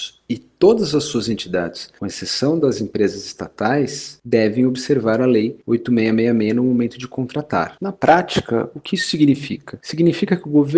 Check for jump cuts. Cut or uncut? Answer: uncut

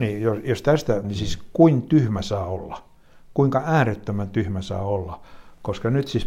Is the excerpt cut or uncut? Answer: cut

